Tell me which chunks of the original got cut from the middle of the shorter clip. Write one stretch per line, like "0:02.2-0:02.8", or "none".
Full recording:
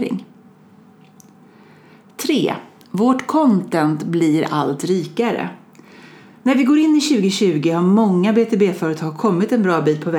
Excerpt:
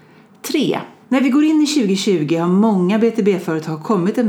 0:02.8-0:06.4